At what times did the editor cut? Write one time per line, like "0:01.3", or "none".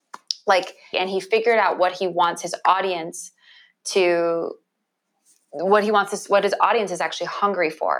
0:00.9